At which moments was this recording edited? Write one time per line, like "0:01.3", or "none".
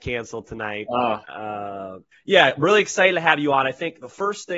0:02.1